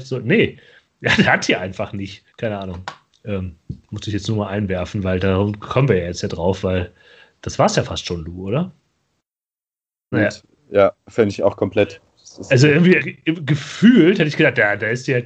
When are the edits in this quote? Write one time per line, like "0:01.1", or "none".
0:02.3
0:10.1
0:13.0